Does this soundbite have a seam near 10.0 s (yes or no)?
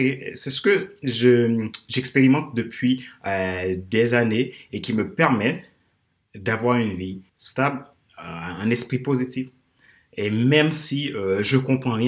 no